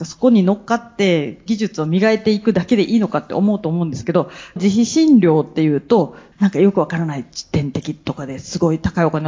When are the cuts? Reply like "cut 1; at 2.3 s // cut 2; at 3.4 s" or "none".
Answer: cut 1; at 4.6 s // cut 2; at 6.3 s